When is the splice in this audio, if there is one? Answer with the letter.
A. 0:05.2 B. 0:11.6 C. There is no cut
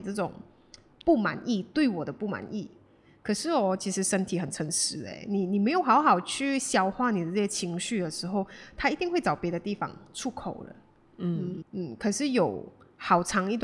B